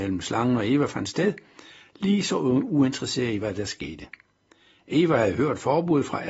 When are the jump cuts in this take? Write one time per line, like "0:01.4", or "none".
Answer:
none